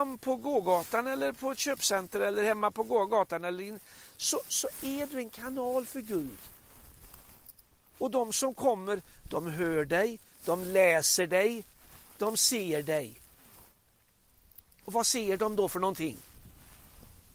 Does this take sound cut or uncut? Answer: uncut